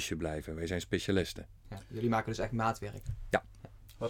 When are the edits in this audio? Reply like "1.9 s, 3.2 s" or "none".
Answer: none